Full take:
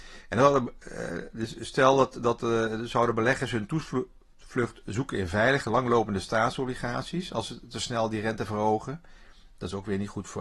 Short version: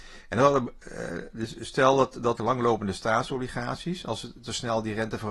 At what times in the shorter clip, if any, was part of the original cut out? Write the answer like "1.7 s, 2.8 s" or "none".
2.4 s